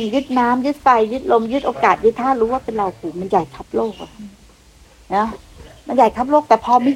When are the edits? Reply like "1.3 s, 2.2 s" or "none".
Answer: none